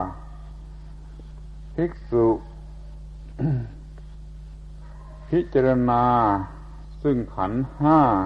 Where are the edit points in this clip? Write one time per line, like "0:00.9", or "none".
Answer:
none